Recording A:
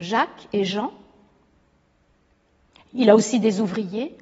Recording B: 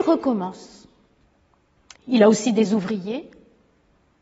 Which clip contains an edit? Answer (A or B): B